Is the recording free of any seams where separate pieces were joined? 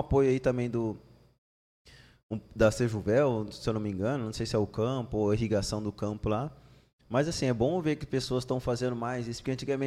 yes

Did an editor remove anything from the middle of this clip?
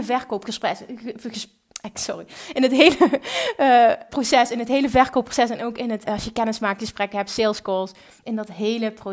yes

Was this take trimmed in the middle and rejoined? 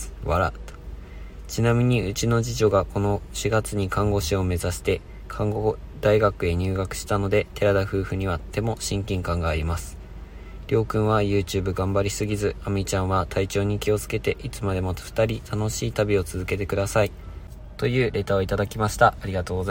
no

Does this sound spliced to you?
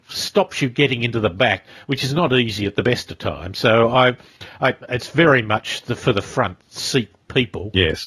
no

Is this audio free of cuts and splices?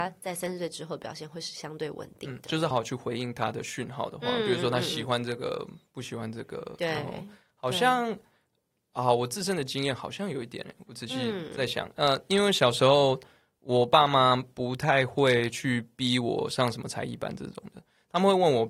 no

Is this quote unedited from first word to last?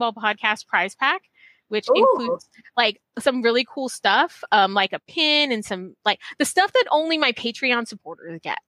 yes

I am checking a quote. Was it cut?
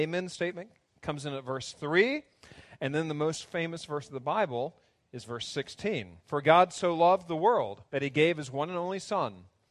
yes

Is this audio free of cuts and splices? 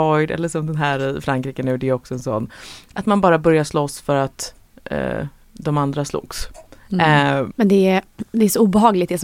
no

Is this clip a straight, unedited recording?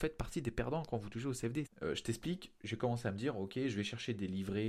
no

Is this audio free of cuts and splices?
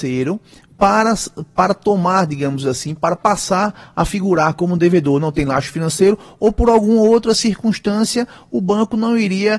yes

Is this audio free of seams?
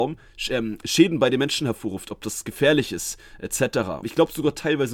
no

